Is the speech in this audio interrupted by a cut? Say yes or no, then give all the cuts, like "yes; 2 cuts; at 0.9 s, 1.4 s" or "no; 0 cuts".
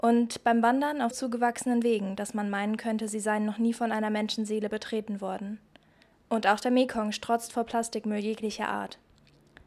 yes; 2 cuts; at 1.1 s, 6.1 s